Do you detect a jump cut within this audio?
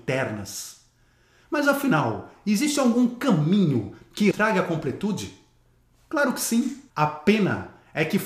yes; 2 cuts; at 4.3 s, 6.9 s

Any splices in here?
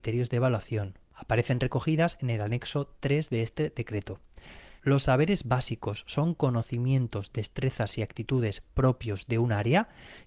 yes; 1 cut; at 4.8 s

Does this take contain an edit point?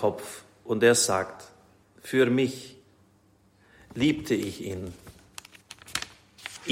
yes; 1 cut; at 1.8 s

